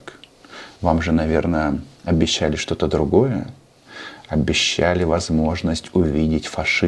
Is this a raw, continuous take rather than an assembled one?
yes; 0 cuts

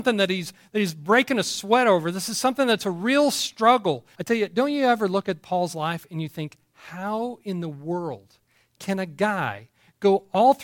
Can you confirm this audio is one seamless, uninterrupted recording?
no; 1 cut; at 4.1 s

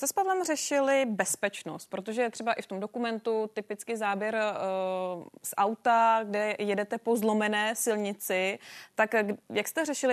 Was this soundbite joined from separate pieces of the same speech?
no; 0 cuts

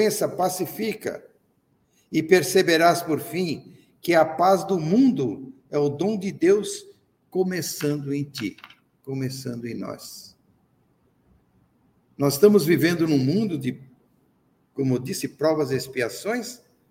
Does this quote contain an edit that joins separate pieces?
no; 0 cuts

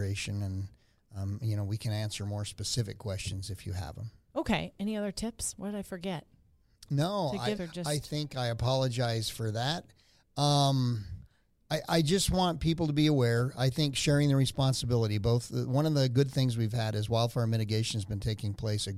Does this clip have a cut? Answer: yes; 1 cut; at 7.6 s

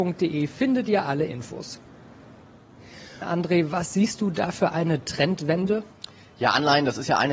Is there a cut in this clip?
yes; 1 cut; at 3.2 s

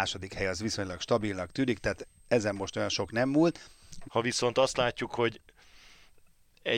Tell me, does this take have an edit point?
yes; 1 cut; at 4.0 s

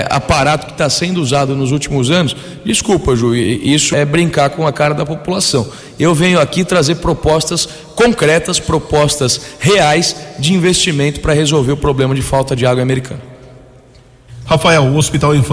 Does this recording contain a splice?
yes; 2 cuts; at 3.9 s, 14.4 s

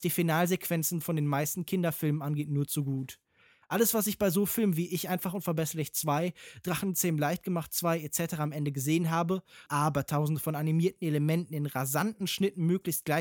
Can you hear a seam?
yes; 1 cut; at 9.7 s

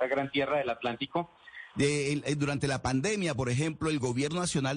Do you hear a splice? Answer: yes; 1 cut; at 1.7 s

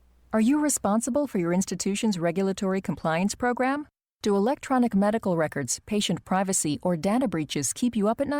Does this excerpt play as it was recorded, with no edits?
yes; 0 cuts

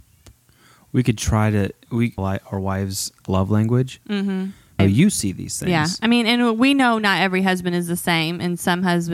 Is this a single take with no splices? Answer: no; 2 cuts; at 2.2 s, 4.8 s

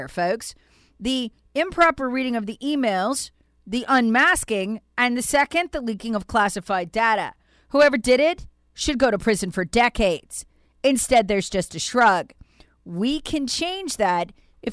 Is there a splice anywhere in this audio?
no; 0 cuts

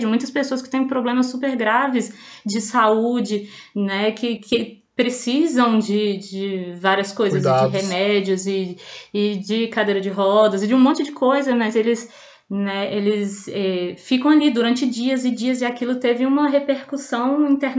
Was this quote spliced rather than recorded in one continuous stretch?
yes; 1 cut; at 4.4 s

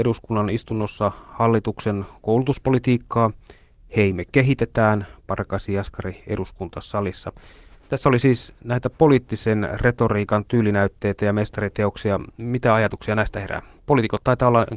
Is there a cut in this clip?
no; 0 cuts

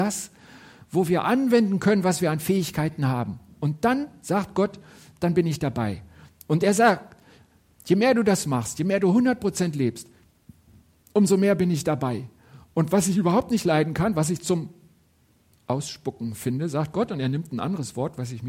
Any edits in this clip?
no; 0 cuts

